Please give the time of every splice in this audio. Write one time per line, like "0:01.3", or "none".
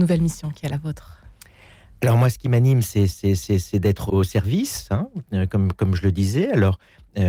0:04.1